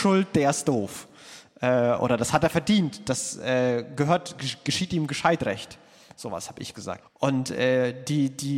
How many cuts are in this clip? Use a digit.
1